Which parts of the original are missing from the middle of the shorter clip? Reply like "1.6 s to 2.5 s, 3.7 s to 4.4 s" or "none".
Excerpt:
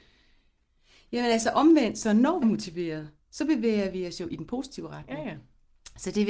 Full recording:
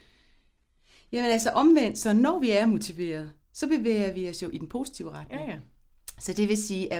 2.4 s to 2.6 s